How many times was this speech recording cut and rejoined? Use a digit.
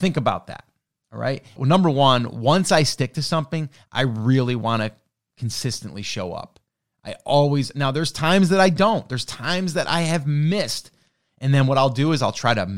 1